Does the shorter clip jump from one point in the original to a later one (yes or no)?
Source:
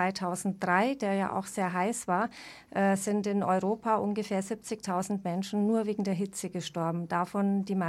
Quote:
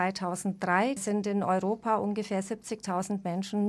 yes